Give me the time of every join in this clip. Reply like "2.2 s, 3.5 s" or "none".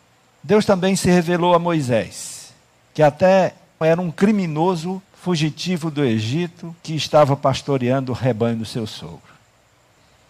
3.8 s, 5.0 s, 6.8 s

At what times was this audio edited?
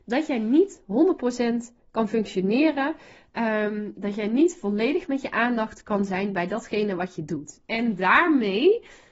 none

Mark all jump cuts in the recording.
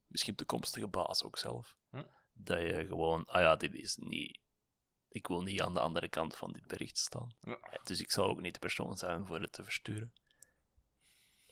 none

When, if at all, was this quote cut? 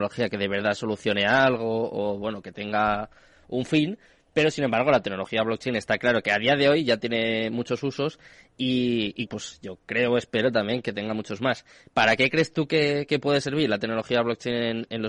9.3 s

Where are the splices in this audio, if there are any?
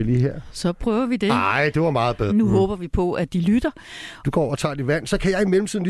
2.3 s, 4.2 s

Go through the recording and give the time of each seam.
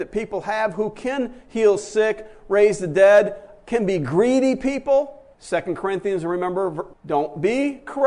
5.3 s, 6.9 s

